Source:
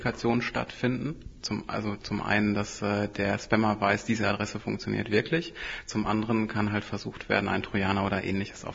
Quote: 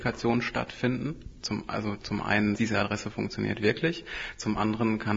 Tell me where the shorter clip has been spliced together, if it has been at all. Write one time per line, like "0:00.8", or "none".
0:02.5